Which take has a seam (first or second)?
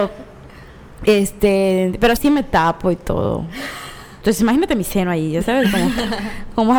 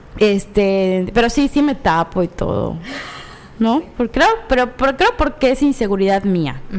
first